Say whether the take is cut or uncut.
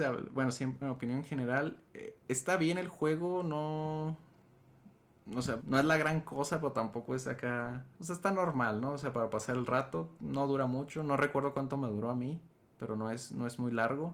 cut